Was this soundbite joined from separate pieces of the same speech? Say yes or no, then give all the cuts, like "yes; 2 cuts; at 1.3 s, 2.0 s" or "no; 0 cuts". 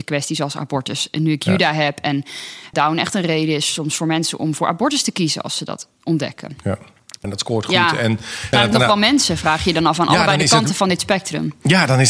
yes; 3 cuts; at 2.7 s, 7.2 s, 8.5 s